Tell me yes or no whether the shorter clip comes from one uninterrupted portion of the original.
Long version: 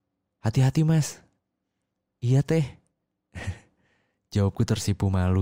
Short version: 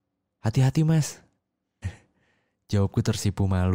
no